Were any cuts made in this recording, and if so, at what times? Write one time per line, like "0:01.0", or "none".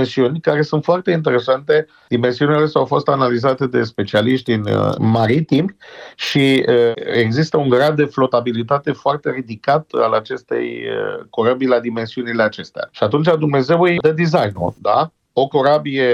0:12.9